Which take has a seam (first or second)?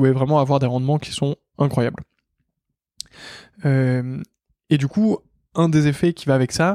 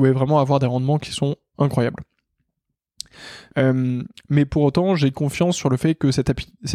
second